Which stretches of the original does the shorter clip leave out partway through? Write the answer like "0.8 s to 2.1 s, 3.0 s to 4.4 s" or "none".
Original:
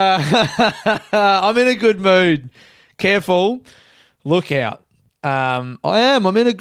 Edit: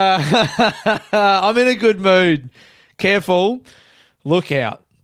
none